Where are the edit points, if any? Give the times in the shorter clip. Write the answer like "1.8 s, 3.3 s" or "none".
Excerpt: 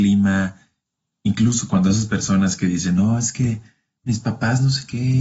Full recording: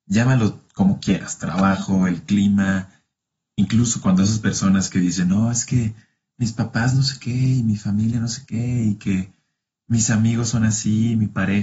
none